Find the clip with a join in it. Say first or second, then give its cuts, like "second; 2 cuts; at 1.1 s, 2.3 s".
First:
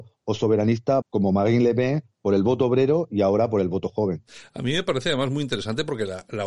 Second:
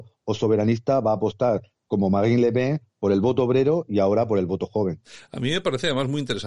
first; 1 cut; at 1.0 s